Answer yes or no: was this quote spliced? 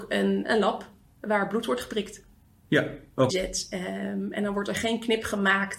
yes